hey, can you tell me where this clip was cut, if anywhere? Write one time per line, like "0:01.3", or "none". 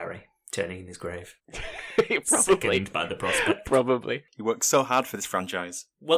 none